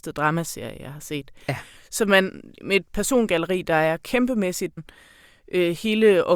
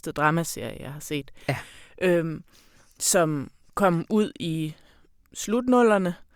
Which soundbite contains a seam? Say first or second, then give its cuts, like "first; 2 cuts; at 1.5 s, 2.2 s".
first; 2 cuts; at 1.8 s, 4.8 s